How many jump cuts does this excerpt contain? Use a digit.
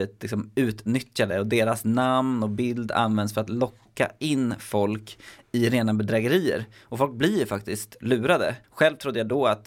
1